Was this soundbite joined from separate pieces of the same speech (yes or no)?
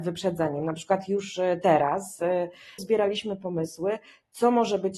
yes